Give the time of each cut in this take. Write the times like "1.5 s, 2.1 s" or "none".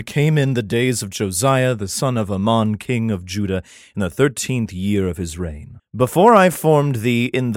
5.8 s